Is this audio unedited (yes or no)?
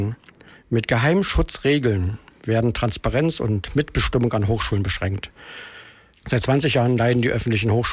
no